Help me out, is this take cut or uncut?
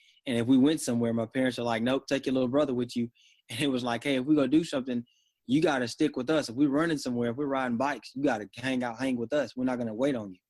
uncut